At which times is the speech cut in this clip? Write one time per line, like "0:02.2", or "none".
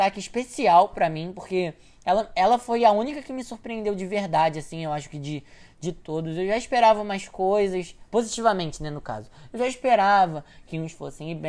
none